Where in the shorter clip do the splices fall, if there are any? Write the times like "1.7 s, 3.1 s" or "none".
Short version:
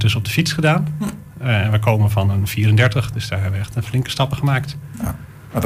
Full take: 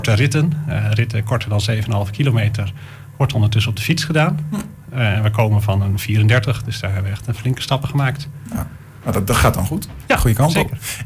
none

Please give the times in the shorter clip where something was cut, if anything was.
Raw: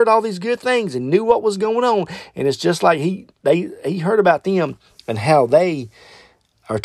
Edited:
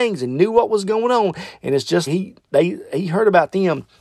2.1 s

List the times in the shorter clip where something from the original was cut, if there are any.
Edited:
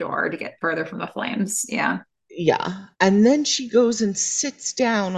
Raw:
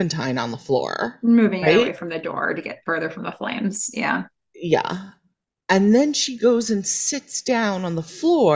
2.9 s

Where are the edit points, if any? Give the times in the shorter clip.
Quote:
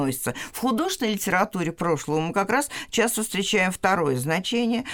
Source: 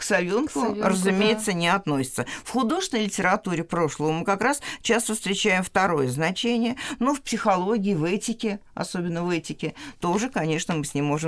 none

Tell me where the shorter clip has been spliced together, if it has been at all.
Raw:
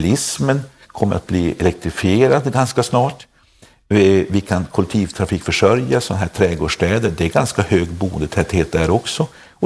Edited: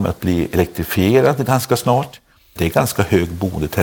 2.6 s

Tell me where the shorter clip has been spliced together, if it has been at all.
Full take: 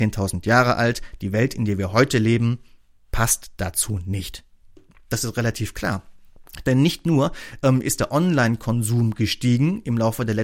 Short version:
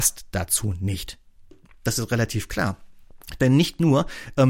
none

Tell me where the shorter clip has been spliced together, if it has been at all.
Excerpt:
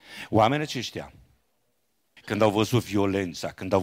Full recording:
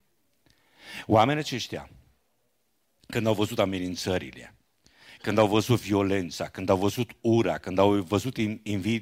2.2 s

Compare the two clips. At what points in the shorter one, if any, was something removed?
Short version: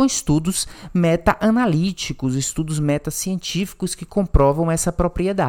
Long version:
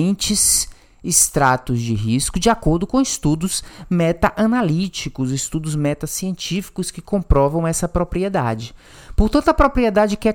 none

